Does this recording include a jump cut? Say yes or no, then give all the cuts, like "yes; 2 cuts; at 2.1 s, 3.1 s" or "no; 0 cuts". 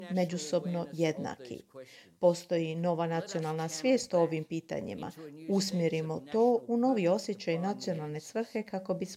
no; 0 cuts